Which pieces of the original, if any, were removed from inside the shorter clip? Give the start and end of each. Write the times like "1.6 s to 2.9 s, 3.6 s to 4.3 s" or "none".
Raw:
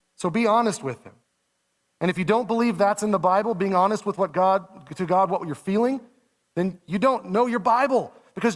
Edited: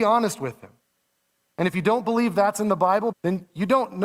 3.5 s to 6.4 s